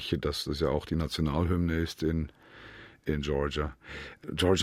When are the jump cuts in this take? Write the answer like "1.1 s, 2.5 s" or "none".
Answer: none